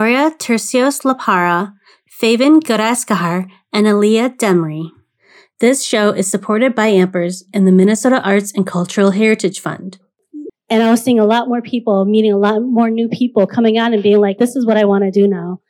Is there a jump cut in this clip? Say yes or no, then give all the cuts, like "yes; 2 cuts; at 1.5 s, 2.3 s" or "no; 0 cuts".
yes; 2 cuts; at 10.5 s, 14.4 s